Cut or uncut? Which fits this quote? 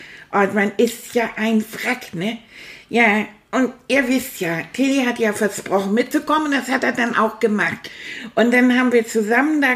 uncut